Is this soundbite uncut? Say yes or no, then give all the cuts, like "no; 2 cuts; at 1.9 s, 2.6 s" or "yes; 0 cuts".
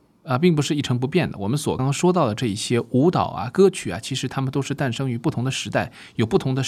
no; 1 cut; at 1.8 s